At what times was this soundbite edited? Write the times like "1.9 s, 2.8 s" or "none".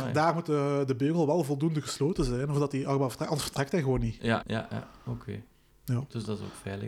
4.4 s